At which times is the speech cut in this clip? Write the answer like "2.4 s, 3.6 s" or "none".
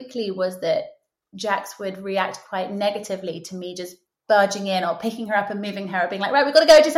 none